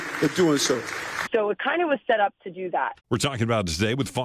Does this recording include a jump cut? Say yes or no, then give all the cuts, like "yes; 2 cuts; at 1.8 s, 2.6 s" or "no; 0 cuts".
yes; 2 cuts; at 1.3 s, 3.0 s